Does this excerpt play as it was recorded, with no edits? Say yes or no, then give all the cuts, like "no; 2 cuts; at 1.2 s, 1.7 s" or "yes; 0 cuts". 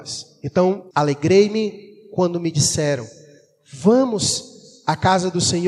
no; 1 cut; at 0.9 s